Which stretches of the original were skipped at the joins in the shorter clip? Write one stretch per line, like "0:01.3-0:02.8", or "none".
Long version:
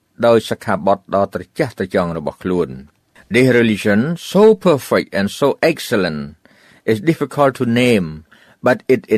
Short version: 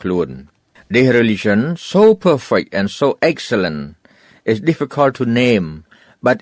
none